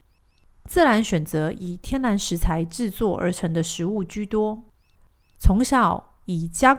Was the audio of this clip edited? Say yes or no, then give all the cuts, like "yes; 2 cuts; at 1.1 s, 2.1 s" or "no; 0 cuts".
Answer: no; 0 cuts